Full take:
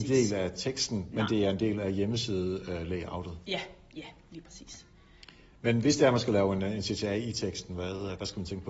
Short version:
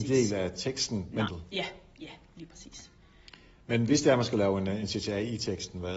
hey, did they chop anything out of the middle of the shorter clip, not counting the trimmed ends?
yes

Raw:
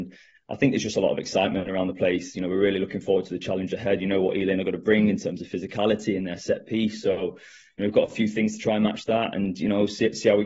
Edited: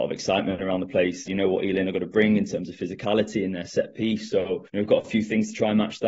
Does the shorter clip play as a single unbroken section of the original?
no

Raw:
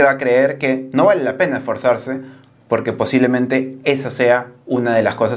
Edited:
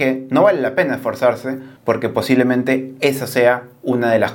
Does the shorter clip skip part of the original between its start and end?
yes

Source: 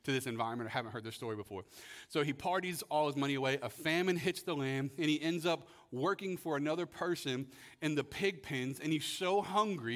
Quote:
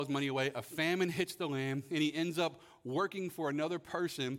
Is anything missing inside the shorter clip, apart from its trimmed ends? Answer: no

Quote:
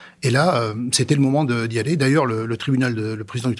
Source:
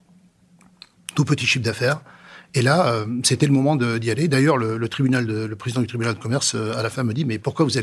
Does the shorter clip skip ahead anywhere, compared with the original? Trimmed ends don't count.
no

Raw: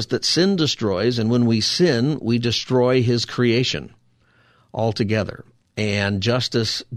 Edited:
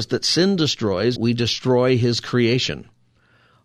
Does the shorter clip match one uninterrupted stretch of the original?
no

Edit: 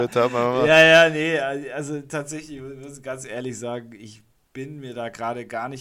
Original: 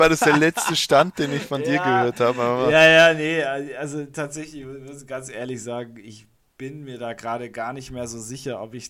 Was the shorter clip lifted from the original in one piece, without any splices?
yes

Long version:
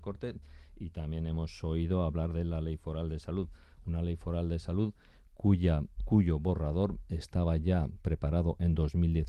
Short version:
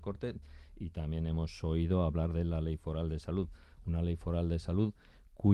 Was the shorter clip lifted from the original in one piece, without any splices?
yes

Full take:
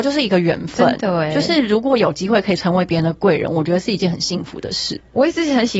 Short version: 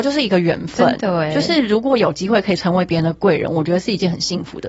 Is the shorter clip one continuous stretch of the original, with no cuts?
yes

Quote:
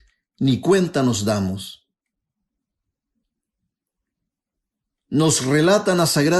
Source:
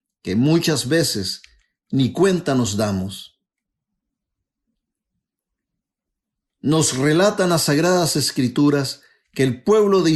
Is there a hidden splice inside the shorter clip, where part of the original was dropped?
no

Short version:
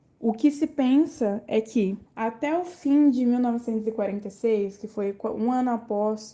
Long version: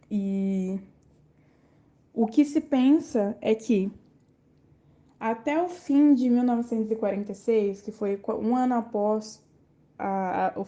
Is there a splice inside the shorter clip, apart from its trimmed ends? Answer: yes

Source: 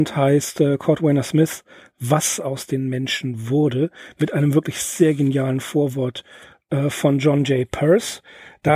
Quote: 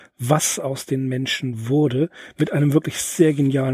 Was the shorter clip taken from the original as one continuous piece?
yes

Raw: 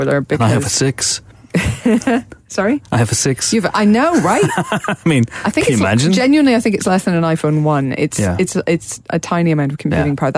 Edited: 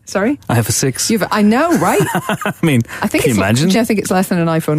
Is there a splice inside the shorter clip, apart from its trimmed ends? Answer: yes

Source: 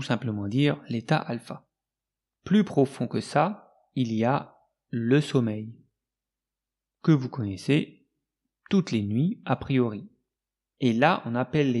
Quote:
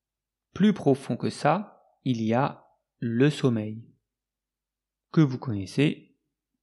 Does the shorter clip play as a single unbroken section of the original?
yes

